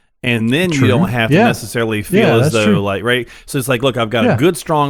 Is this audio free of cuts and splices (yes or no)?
yes